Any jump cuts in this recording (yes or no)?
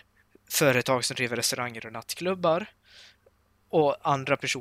no